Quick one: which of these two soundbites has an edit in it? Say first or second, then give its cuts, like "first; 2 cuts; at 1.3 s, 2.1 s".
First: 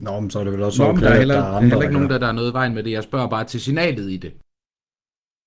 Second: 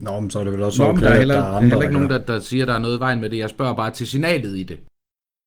first; 1 cut; at 2.2 s